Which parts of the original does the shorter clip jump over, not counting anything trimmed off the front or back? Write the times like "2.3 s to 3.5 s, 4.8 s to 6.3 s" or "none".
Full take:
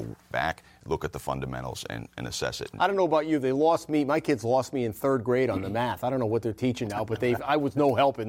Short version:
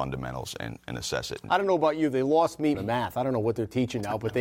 4.0 s to 5.6 s